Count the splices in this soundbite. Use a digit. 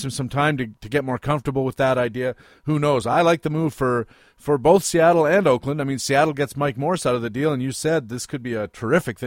0